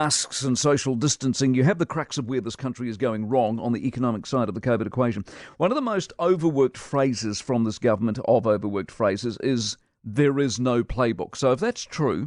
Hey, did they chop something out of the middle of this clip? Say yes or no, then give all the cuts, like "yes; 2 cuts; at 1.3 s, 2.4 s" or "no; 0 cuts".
no; 0 cuts